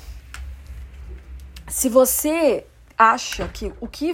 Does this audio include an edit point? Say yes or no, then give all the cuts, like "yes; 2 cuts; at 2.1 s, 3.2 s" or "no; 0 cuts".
no; 0 cuts